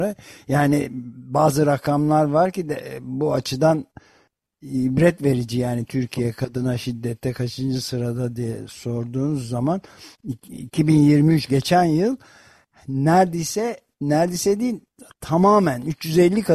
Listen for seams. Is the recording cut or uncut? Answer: uncut